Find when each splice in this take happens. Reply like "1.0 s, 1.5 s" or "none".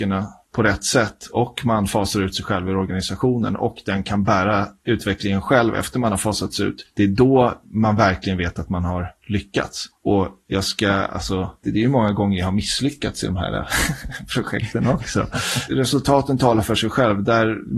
11.6 s, 15.7 s